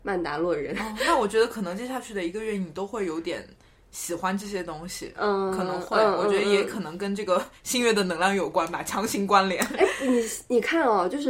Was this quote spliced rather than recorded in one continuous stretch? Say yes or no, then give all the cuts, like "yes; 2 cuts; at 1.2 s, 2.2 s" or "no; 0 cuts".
no; 0 cuts